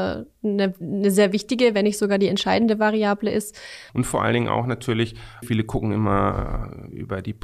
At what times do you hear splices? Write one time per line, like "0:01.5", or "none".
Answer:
0:03.9
0:05.4